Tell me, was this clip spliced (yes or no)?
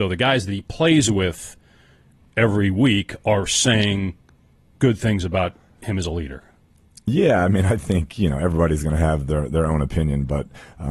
no